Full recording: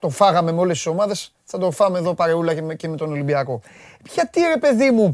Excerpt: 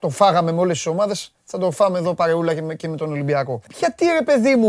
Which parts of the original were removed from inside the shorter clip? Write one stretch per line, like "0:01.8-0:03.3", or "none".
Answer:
0:03.7-0:04.0